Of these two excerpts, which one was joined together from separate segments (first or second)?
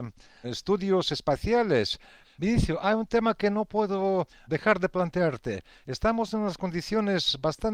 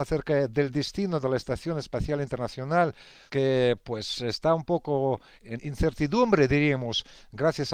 first